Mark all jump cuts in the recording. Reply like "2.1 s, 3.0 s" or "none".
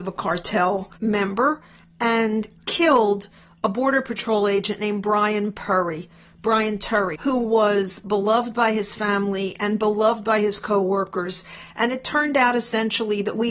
7.2 s

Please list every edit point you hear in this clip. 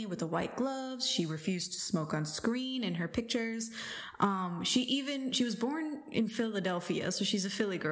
none

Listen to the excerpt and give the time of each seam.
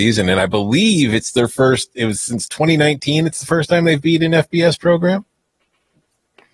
none

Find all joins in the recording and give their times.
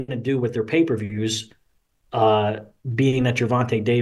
none

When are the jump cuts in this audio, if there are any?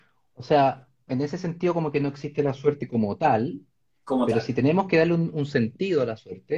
1.1 s

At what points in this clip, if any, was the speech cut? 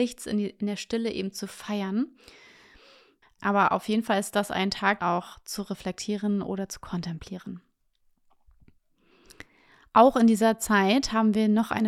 3.2 s, 5.0 s

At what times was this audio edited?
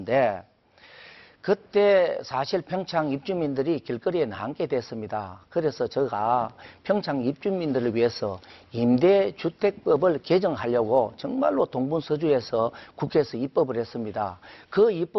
none

